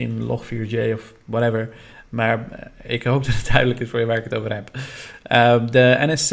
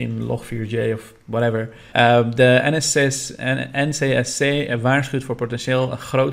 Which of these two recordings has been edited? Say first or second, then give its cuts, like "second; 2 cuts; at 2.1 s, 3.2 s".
second; 1 cut; at 1.9 s